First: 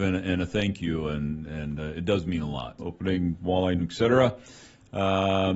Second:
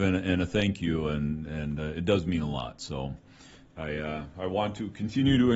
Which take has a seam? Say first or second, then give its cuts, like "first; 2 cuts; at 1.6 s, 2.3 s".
first; 2 cuts; at 2.8 s, 3.8 s